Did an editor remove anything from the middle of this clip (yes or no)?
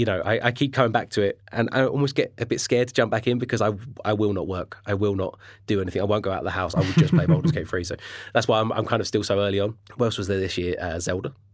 no